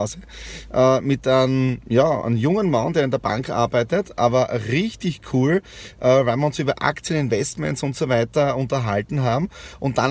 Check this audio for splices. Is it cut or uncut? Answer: uncut